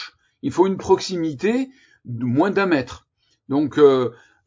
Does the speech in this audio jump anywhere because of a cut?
no; 0 cuts

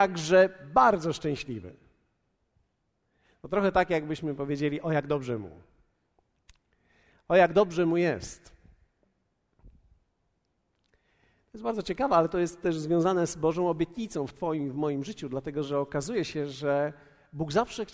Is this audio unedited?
yes; 0 cuts

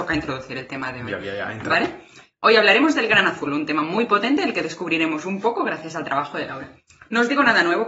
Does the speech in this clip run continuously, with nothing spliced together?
yes; 0 cuts

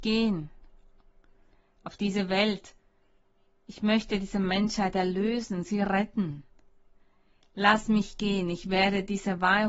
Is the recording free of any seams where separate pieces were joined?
yes; 0 cuts

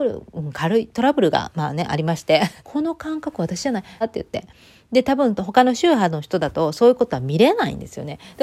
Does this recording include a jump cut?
yes; 2 cuts; at 2.6 s, 4.0 s

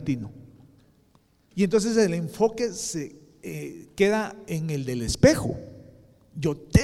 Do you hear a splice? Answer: yes; 1 cut; at 1.5 s

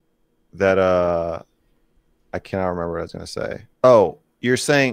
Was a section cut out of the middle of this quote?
yes; 1 cut; at 3.7 s

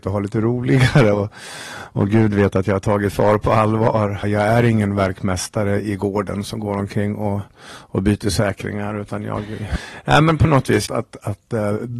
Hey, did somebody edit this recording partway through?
yes; 3 cuts; at 4.2 s, 9.8 s, 10.9 s

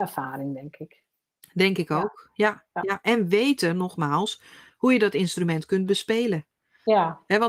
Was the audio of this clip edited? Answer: no; 0 cuts

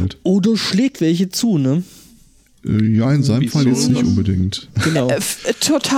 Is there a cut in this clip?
yes; 2 cuts; at 1.0 s, 4.8 s

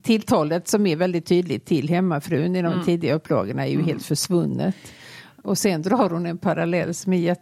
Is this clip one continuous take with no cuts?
yes; 0 cuts

